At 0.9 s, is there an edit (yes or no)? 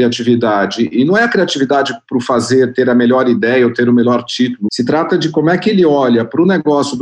no